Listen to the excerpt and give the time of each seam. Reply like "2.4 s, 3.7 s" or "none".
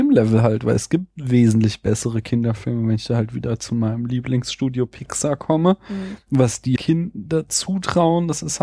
6.8 s

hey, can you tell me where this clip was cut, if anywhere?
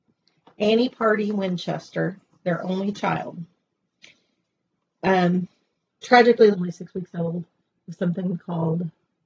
6.5 s

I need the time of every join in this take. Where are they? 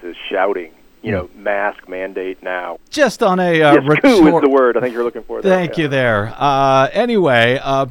2.8 s

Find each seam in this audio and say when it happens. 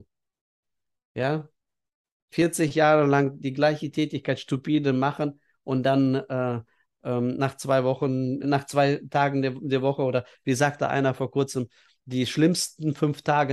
8.4 s

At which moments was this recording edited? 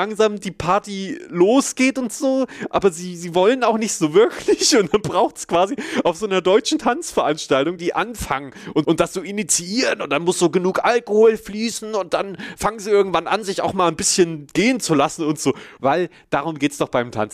7.8 s, 8.8 s, 15.8 s

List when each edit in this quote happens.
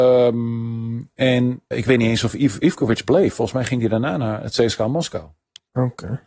1.7 s

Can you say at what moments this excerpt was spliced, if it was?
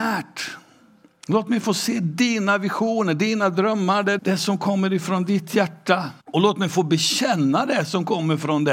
4.2 s, 6.2 s

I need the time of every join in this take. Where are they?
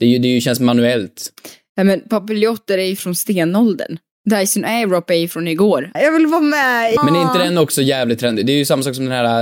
5.9 s, 7.0 s

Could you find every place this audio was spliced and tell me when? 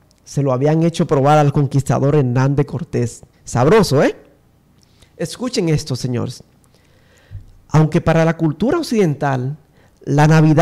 3.3 s

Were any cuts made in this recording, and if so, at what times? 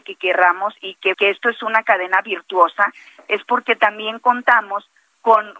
1.1 s

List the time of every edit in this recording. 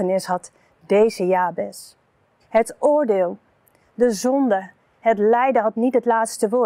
2.4 s

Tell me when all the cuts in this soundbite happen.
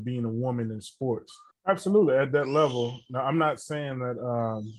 1.5 s

